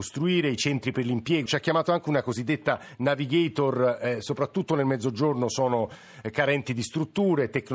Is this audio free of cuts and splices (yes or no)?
no